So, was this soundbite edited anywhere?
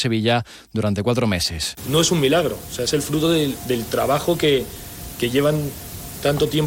no; 0 cuts

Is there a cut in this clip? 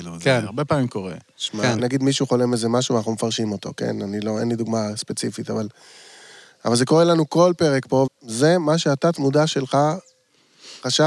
yes; 2 cuts; at 1.8 s, 8.1 s

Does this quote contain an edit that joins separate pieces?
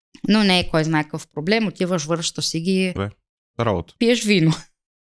yes; 1 cut; at 3.0 s

